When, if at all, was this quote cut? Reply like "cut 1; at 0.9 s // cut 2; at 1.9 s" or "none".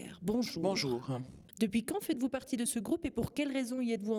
cut 1; at 1.5 s